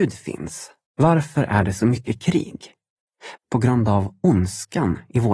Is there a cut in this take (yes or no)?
yes